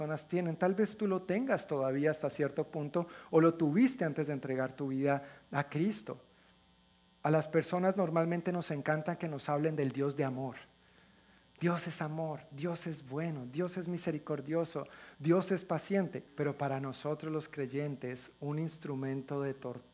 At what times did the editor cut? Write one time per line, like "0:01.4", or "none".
0:16.3